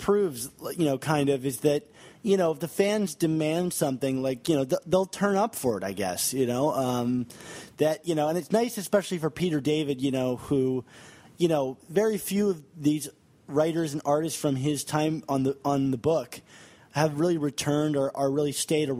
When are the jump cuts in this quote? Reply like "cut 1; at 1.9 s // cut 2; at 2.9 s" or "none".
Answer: none